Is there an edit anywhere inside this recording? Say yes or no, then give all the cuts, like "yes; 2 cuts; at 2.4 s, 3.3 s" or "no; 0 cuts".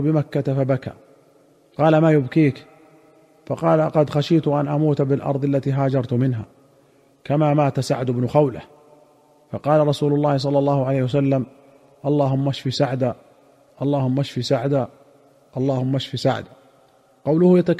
no; 0 cuts